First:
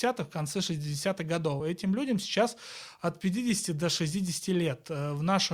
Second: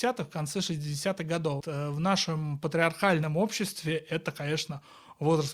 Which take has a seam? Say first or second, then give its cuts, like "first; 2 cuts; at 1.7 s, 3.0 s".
second; 1 cut; at 1.6 s